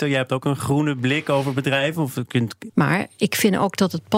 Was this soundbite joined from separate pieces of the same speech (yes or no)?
yes